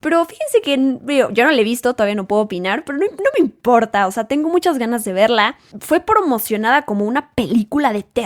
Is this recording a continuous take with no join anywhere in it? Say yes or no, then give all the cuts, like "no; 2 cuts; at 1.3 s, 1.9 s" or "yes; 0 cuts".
yes; 0 cuts